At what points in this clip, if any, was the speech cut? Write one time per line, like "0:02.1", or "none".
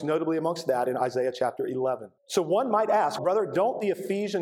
0:02.2
0:03.2